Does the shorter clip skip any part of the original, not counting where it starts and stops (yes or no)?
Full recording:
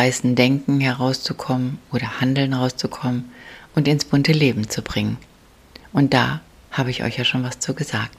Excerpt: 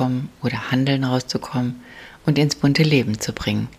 no